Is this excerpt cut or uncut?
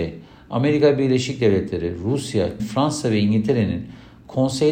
cut